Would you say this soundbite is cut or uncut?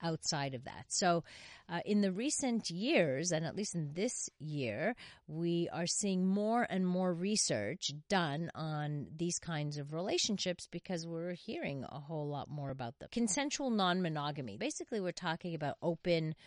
cut